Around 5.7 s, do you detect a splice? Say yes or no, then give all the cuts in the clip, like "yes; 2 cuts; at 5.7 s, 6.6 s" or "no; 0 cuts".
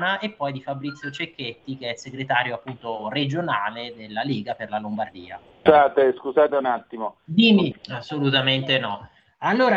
yes; 2 cuts; at 5.7 s, 7.7 s